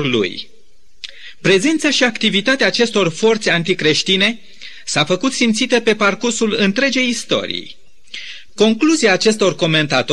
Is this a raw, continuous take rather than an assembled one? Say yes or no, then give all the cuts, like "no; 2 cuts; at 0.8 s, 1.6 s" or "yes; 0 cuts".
no; 1 cut; at 8.5 s